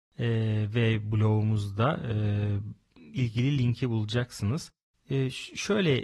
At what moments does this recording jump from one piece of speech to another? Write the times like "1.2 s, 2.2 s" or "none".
4.9 s